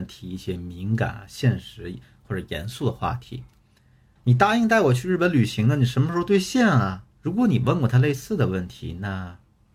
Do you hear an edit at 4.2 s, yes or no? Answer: yes